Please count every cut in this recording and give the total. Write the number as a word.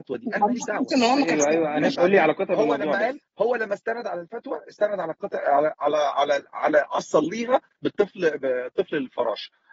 one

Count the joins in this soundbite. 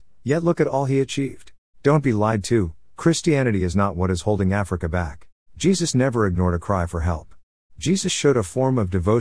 three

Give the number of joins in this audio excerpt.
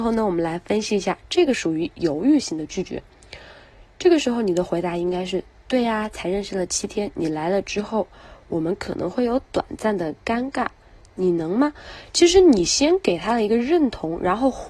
zero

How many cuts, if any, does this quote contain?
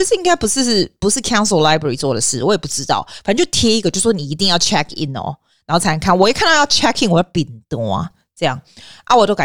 zero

